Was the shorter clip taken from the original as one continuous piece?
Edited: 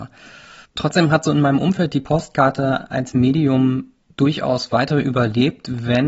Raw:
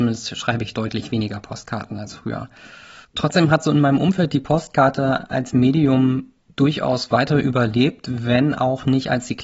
yes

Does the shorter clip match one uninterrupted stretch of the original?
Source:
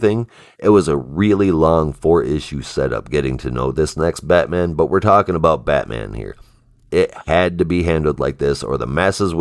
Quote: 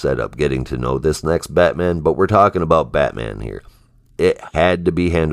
yes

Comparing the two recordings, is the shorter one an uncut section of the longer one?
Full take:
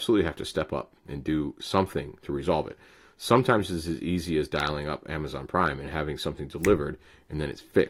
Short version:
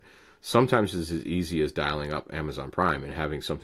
yes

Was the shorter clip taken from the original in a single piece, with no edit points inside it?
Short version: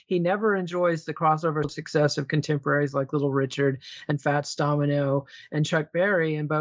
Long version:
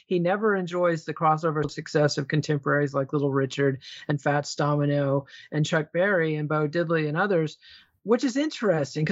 yes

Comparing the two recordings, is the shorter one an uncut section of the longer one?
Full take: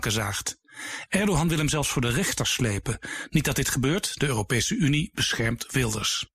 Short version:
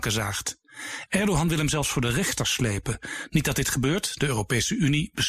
yes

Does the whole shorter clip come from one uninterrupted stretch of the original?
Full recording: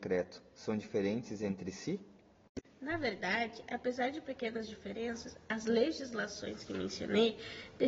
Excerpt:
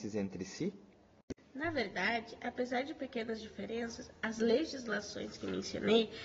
yes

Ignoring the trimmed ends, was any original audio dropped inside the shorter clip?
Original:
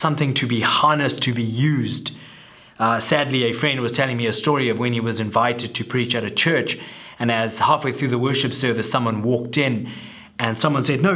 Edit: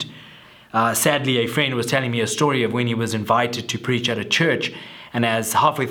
no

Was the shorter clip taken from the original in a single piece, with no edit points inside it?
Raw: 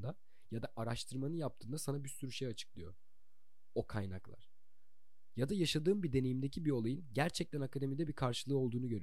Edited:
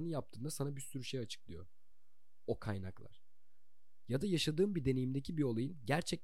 yes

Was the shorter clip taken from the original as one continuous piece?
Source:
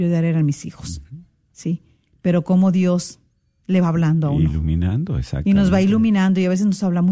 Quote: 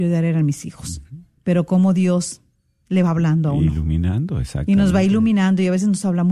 no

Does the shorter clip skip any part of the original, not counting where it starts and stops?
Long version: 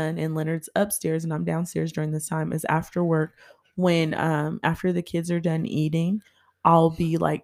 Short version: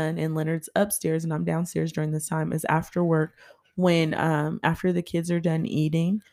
no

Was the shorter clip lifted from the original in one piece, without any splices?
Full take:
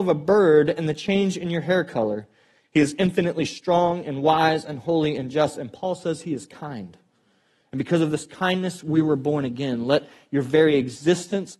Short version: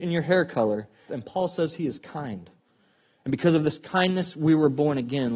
no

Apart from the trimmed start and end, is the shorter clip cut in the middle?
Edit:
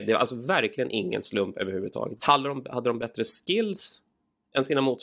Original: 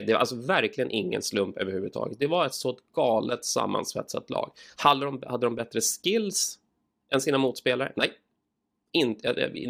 yes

